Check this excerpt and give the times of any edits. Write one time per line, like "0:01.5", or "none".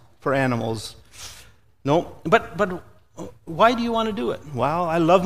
none

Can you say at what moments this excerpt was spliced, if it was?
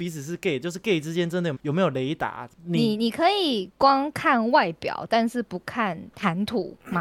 0:01.5

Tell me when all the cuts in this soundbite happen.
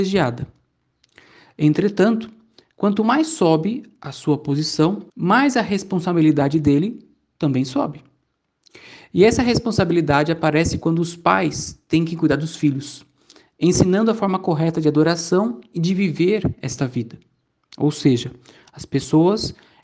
0:05.1

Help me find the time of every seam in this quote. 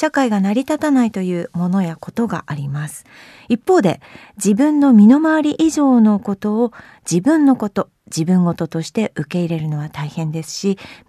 none

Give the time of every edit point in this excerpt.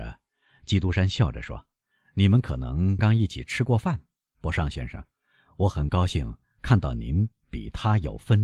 0:03.0

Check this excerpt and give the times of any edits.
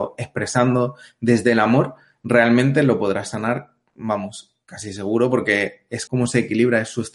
0:06.1

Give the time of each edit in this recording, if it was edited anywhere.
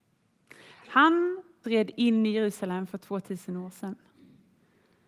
0:01.6

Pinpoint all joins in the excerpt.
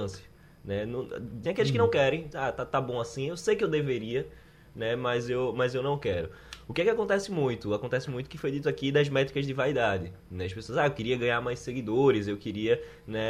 0:01.4

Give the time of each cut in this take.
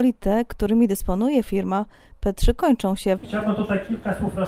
0:03.2

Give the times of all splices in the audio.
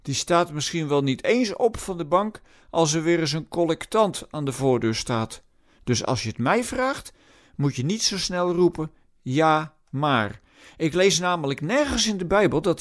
none

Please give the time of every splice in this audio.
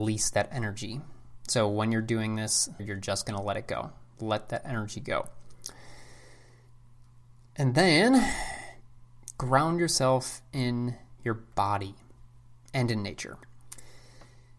0:02.8

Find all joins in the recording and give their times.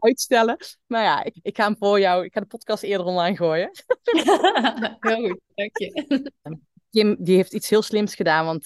0:01.3
0:06.5

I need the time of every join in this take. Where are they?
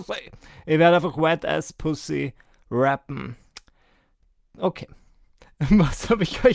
none

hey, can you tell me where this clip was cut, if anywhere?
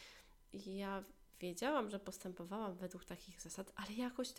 none

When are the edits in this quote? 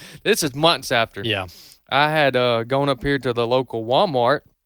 none

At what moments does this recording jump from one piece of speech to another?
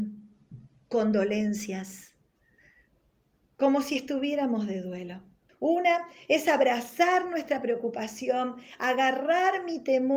0:05.5

